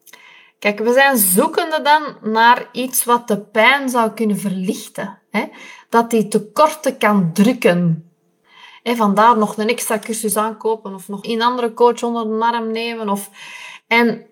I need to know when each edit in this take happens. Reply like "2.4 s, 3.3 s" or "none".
11.2 s